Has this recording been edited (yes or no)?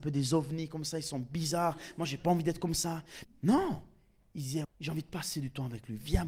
yes